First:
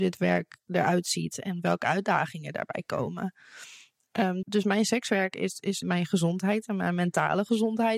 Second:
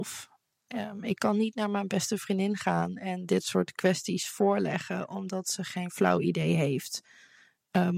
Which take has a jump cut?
first; 2 cuts; at 4.4 s, 5.8 s

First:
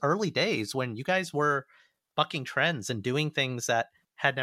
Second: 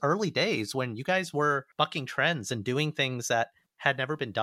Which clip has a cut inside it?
second; 1 cut; at 1.7 s

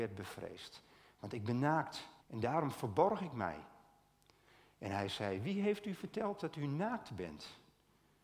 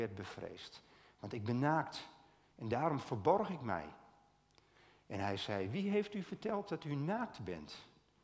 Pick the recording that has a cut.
first; 1 cut; at 2.2 s

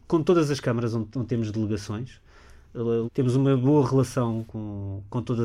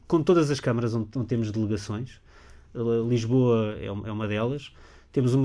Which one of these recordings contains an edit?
first; 2 cuts; at 3.0 s, 4.5 s

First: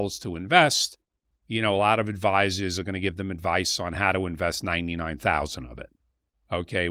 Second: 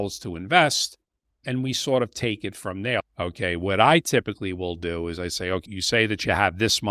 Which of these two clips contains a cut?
second; 3 cuts; at 1.3 s, 3.0 s, 5.7 s

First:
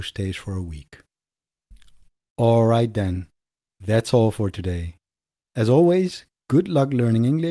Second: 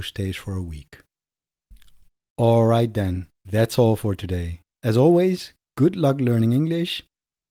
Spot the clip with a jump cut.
second; 2 cuts; at 3.3 s, 4.7 s

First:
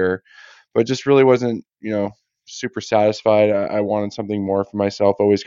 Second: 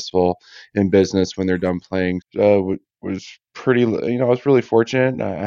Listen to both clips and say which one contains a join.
second; 1 cut; at 2.2 s

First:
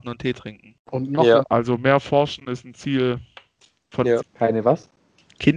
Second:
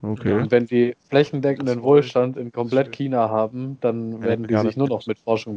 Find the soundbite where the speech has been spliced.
first; 2 cuts; at 1.4 s, 4.2 s

